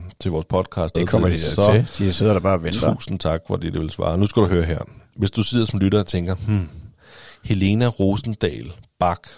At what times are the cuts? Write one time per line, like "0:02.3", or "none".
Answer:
0:00.9